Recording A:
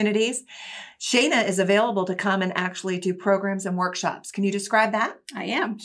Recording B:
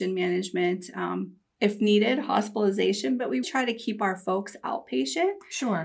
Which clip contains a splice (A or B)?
B